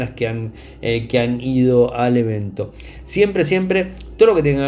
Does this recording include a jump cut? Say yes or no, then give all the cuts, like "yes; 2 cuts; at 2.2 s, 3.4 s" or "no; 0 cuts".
no; 0 cuts